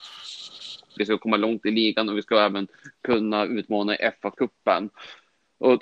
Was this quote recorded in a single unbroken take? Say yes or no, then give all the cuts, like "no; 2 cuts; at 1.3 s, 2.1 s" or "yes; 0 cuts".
no; 1 cut; at 1.0 s